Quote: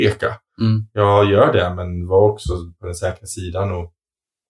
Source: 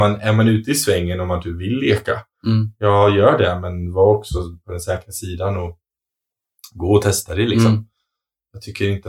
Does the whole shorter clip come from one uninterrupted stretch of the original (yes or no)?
yes